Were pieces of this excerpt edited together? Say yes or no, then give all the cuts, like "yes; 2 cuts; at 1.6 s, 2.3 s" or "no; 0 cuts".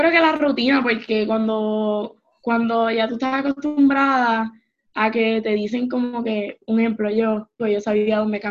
yes; 1 cut; at 7.6 s